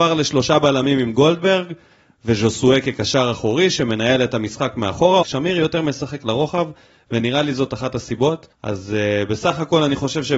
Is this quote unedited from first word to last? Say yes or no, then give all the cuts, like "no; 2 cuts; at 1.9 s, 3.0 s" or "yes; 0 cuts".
no; 2 cuts; at 5.2 s, 8.5 s